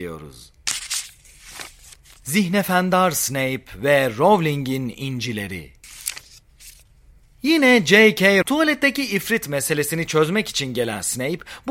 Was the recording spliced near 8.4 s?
yes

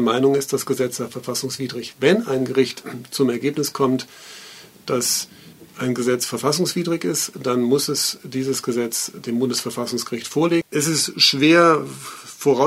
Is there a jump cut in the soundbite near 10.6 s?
yes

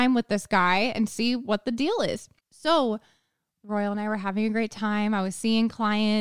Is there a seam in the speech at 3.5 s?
yes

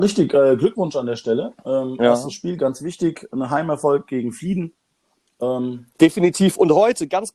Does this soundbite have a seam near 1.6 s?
no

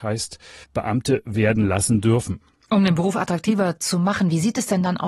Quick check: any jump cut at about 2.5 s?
no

